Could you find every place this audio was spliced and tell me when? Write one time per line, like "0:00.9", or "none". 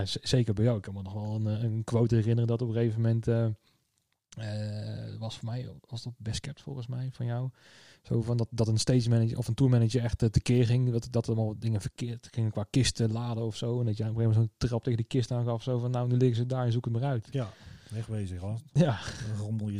none